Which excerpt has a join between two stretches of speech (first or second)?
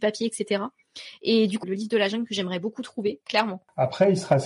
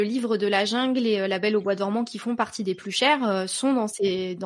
first